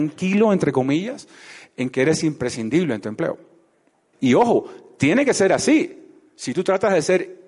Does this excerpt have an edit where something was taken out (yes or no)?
yes